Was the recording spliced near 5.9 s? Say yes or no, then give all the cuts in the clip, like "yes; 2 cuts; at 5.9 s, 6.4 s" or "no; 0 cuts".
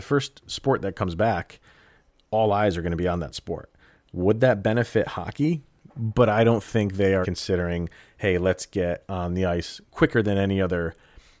yes; 2 cuts; at 5.9 s, 7.2 s